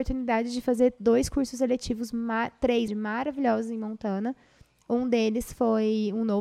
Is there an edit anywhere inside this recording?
yes; 1 cut; at 2.9 s

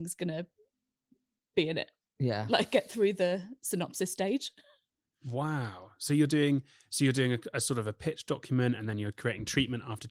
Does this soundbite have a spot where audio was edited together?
no; 0 cuts

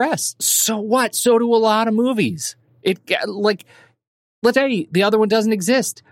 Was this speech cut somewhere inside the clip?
yes; 1 cut; at 4.5 s

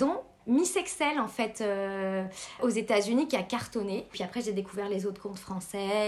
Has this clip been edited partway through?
yes; 1 cut; at 2.6 s

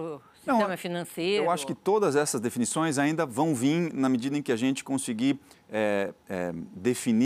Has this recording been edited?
no; 0 cuts

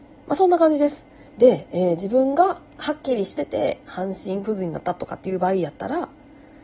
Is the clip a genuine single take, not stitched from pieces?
no; 1 cut; at 1.3 s

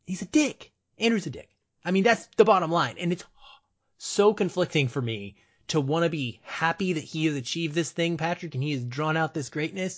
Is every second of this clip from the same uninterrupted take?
yes; 0 cuts

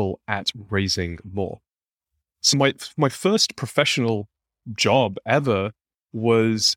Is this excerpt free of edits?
yes; 0 cuts

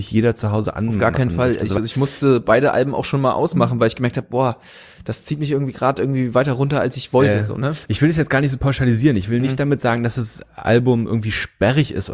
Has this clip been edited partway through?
no; 0 cuts

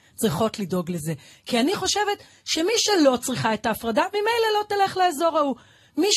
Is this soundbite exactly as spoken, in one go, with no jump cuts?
yes; 0 cuts

